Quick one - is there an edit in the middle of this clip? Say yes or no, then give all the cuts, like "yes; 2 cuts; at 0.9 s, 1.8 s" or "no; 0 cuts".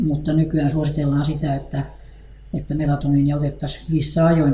no; 0 cuts